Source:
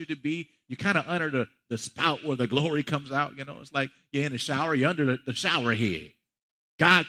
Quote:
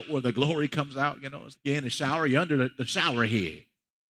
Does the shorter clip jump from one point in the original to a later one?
yes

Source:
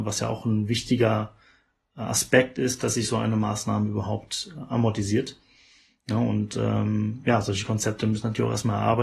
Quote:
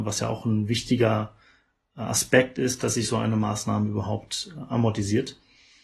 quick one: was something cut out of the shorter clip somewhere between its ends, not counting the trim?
no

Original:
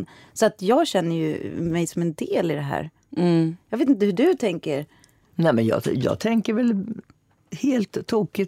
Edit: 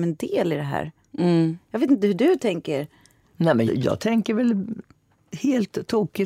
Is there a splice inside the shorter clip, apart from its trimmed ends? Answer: yes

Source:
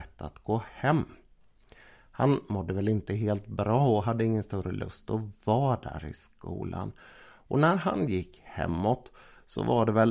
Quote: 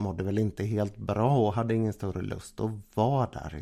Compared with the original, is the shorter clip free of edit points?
yes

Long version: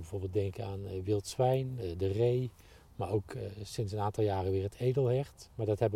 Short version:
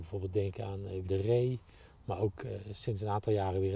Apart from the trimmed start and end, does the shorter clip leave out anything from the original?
yes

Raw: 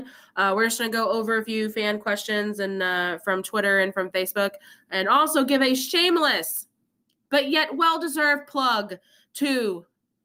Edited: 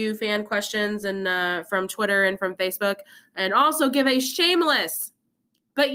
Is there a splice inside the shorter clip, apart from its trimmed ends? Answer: no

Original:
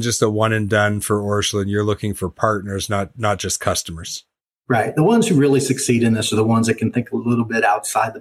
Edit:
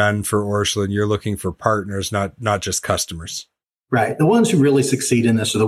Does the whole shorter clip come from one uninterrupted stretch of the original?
yes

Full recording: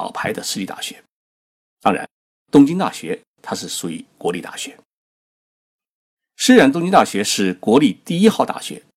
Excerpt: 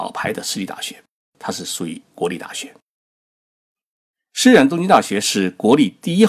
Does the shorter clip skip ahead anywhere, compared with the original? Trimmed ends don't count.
yes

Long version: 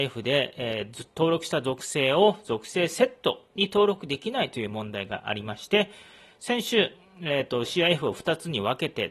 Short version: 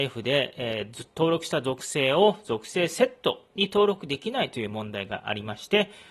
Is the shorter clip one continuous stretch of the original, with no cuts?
yes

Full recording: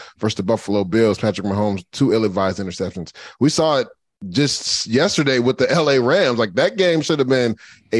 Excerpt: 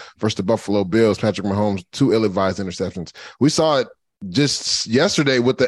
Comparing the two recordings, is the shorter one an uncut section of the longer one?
yes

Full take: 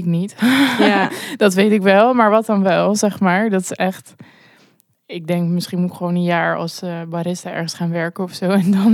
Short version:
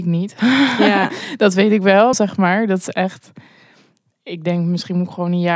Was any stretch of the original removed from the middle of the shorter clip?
yes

